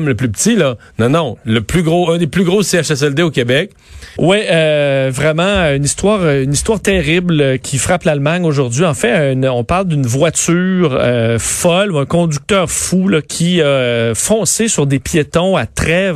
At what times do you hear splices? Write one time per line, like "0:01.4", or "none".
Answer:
0:04.2